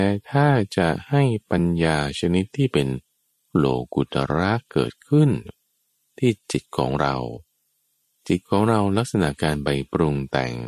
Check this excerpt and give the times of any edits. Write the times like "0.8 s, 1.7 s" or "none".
none